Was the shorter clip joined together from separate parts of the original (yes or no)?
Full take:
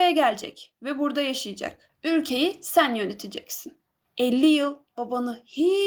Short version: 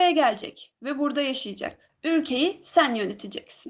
no